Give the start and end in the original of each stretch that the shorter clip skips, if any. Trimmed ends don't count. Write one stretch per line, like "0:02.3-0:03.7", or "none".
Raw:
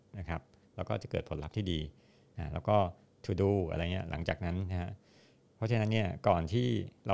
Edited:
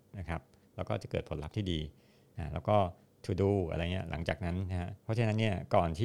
0:05.0-0:05.5